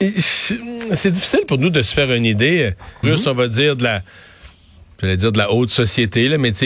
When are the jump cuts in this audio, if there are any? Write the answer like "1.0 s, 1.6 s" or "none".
3.0 s

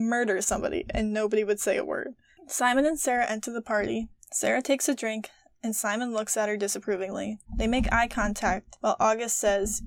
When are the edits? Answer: 2.4 s, 7.5 s

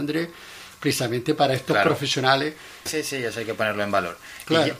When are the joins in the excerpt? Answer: 2.9 s

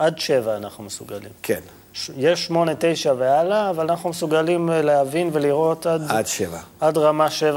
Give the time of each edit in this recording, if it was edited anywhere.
none

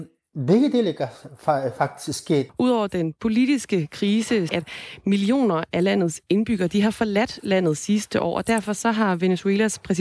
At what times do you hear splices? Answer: 2.5 s, 4.5 s

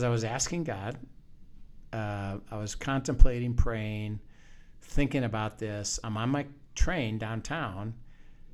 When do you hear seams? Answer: none

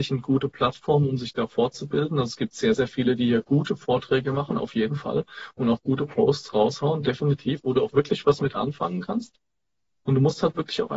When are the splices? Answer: none

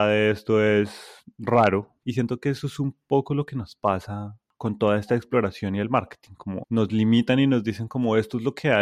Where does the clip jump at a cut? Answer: 2.0 s

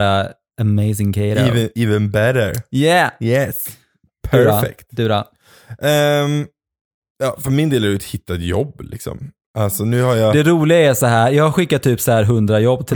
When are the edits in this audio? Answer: none

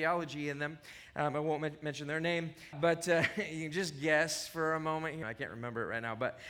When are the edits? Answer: 2.7 s, 5.2 s

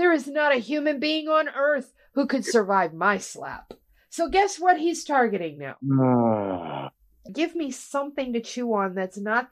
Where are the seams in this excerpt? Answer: 7.3 s

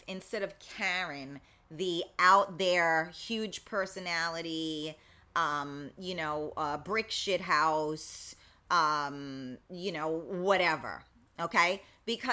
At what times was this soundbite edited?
none

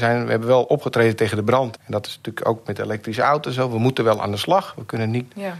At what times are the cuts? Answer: 1.8 s

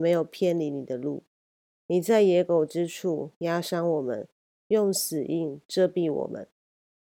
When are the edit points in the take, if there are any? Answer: none

